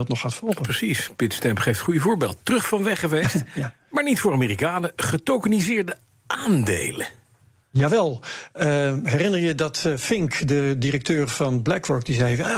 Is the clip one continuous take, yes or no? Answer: yes